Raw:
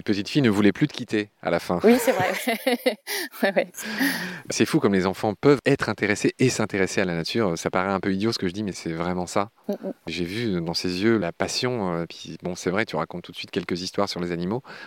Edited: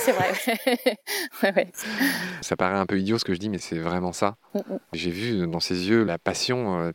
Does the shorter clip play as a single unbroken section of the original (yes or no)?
no